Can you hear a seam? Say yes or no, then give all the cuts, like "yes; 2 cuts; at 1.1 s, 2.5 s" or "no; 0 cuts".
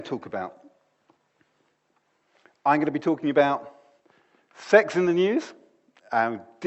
no; 0 cuts